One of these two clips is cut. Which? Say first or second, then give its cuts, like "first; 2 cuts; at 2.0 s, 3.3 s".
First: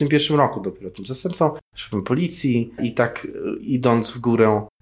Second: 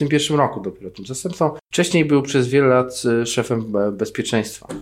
first; 2 cuts; at 1.6 s, 2.8 s